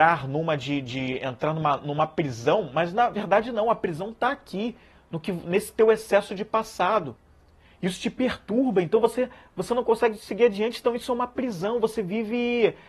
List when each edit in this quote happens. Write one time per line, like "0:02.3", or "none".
none